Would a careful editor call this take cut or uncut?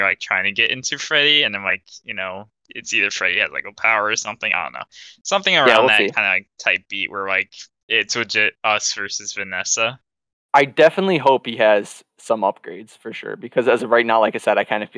uncut